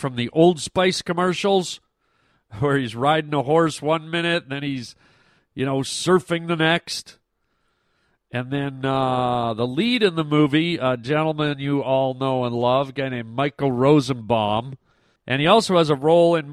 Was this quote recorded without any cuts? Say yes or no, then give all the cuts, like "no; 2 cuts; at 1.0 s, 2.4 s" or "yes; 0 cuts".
no; 1 cut; at 15.2 s